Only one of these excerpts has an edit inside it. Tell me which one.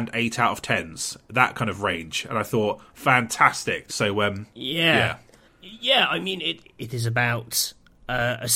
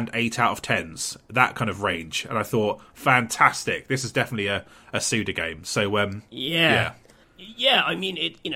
first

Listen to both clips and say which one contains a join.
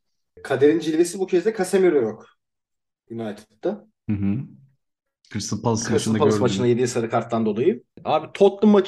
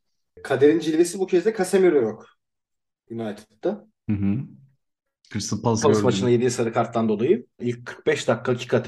second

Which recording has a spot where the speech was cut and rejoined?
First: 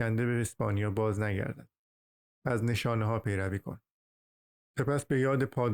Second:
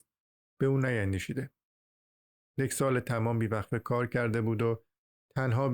first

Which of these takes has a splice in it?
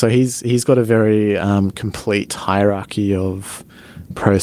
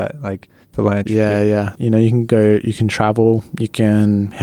second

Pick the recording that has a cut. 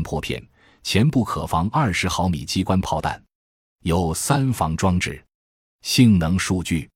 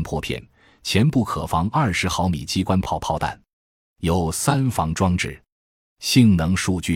first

